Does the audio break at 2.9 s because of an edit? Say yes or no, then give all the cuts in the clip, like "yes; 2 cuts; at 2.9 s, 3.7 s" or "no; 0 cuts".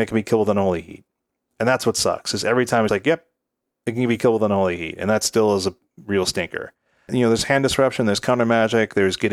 yes; 1 cut; at 2.9 s